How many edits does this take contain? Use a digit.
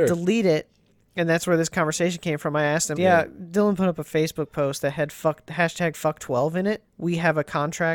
2